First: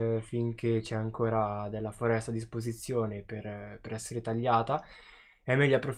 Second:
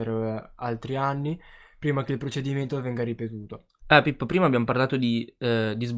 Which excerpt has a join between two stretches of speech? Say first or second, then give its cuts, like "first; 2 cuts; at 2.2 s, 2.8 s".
second; 1 cut; at 3.8 s